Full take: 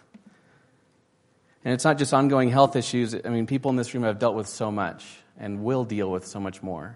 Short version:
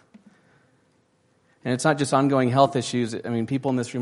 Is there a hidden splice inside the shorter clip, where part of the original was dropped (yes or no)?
no